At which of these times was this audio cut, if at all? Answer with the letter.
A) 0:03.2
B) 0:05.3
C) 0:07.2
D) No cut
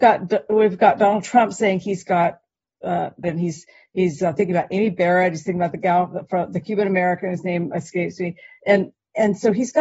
A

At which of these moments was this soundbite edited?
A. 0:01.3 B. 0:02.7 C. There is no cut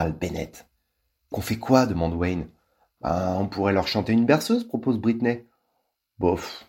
A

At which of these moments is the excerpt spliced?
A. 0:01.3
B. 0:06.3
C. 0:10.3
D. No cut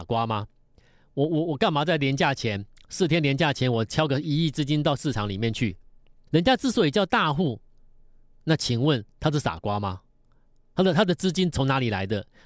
B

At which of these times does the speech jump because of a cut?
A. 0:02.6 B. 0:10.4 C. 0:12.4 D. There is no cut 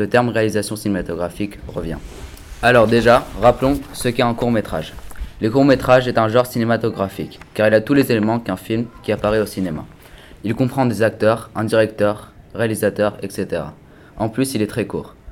A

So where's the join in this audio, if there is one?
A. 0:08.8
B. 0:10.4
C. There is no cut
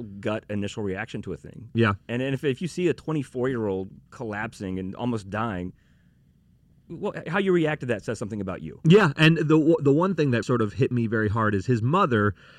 B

